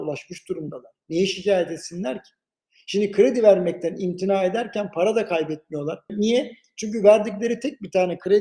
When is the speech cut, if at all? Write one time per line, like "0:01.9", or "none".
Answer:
0:06.1